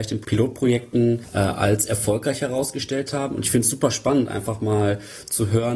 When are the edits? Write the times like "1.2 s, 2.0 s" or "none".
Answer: none